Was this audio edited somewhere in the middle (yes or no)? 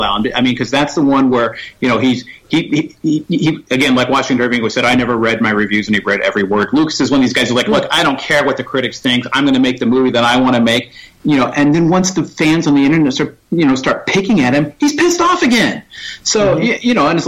no